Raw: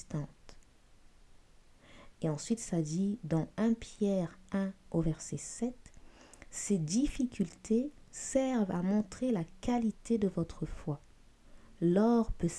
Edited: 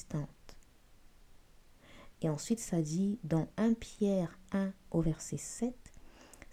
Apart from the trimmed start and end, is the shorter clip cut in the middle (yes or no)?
no